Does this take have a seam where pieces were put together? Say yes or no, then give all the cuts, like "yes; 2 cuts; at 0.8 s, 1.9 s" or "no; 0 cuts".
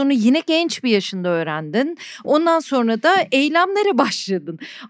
no; 0 cuts